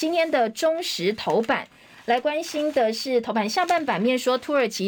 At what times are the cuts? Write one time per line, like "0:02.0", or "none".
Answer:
none